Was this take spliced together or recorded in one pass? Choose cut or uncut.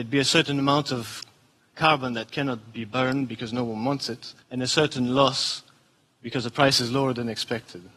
cut